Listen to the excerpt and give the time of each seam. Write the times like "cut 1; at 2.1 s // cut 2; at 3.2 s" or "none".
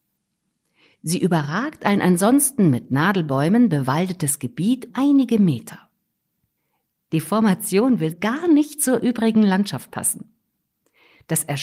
cut 1; at 4.9 s // cut 2; at 8.1 s